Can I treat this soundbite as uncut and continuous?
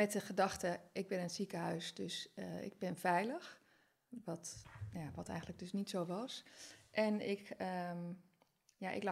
yes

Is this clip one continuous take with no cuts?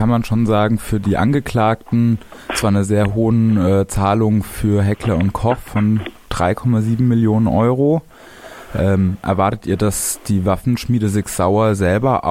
yes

